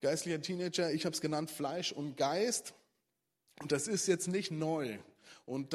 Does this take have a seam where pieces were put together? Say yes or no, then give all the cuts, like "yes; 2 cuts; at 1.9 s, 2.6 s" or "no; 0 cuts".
no; 0 cuts